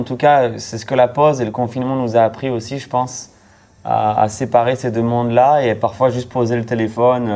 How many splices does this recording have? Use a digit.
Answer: 0